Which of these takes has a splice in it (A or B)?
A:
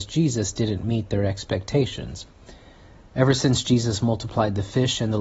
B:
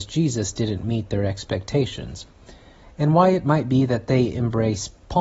B